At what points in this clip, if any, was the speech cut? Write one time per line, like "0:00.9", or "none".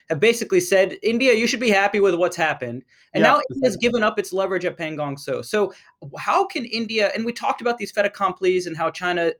none

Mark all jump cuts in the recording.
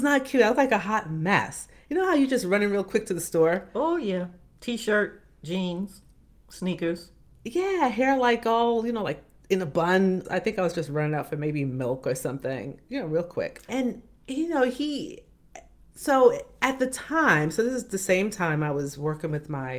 0:10.2
0:13.7

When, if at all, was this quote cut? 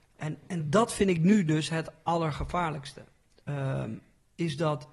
none

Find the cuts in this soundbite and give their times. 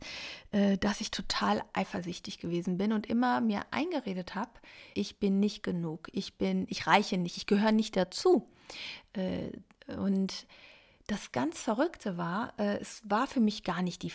0:04.9

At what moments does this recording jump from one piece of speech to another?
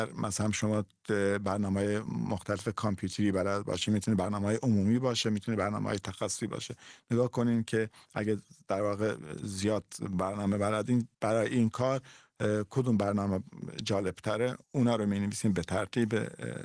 0:11.1
0:14.6

